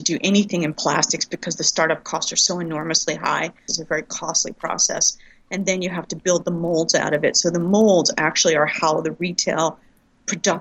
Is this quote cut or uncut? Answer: cut